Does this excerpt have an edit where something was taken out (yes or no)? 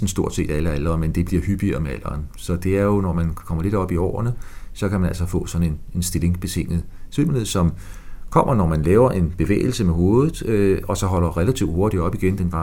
no